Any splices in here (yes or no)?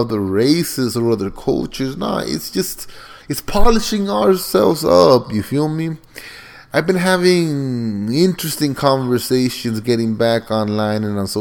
no